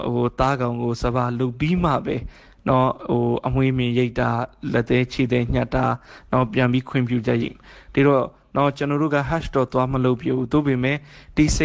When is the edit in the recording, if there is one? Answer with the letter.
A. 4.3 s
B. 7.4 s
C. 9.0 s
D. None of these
B